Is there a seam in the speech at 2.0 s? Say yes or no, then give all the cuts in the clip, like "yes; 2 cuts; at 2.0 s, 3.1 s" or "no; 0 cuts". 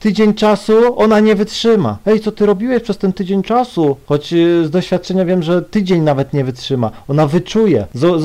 yes; 1 cut; at 2.0 s